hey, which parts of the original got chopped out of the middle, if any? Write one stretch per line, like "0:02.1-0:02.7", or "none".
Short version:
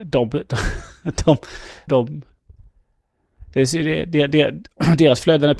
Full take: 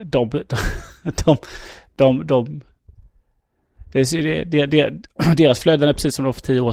0:01.9-0:02.3

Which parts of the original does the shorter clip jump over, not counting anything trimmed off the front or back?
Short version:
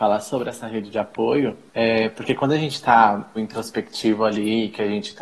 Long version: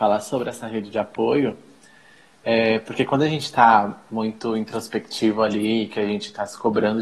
0:01.7-0:02.4
0:04.1-0:04.5

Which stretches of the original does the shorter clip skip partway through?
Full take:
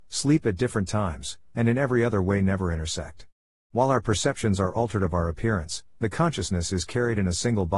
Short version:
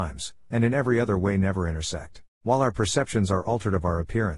0:03.4-0:03.6

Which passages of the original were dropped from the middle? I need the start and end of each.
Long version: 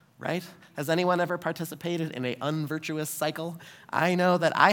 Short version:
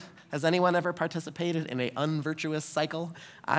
none

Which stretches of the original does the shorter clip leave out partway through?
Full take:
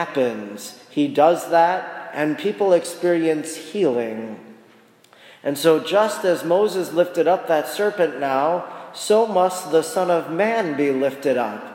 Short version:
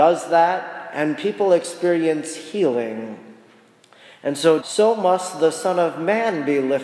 0:05.8-0:08.9

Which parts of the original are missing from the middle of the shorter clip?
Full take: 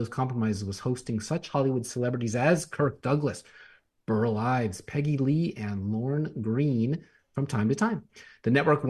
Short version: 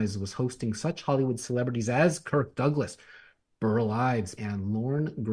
0:04.8-0:05.5

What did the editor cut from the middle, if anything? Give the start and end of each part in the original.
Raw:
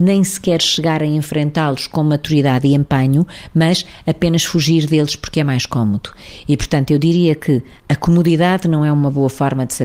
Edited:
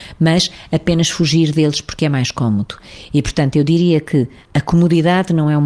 none

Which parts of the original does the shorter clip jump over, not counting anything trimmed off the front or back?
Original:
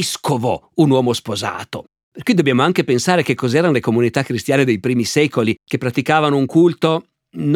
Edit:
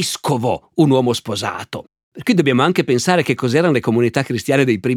none

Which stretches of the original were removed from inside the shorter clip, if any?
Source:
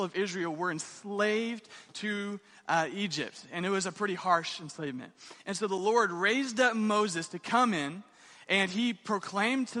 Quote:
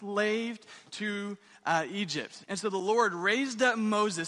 0:03.5-0:05.4

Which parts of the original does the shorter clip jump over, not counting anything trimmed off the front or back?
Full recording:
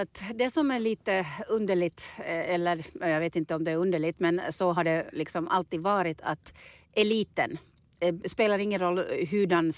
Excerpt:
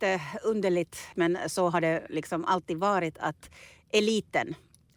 0:02.2-0:04.2

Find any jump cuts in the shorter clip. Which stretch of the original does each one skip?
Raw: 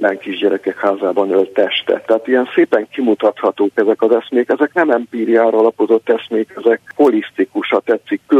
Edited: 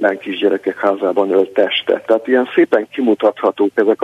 none

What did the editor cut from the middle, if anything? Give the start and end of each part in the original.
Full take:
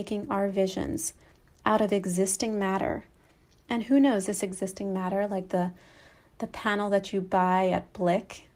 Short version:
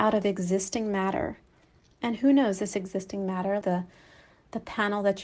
0:05.3-0:05.5

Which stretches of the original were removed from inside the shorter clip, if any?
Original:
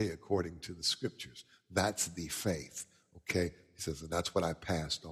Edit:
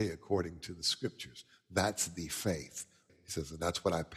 0:03.1-0:03.6

